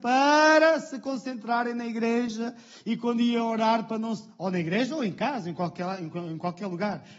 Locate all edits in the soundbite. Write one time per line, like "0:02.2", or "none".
none